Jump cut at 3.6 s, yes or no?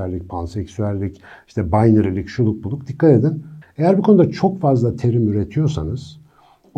yes